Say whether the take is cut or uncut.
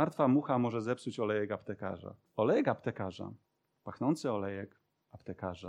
cut